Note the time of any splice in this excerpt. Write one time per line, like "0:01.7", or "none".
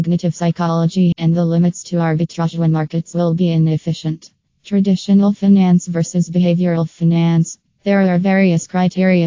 0:01.1